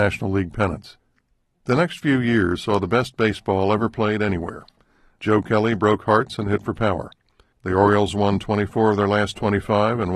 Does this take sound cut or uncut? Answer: cut